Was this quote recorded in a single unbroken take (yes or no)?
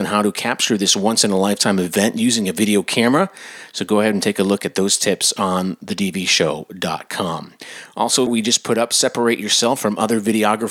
no